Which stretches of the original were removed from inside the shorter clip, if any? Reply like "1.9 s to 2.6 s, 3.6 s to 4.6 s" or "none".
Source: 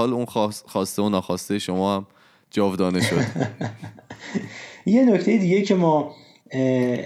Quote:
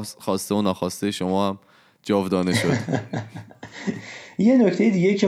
none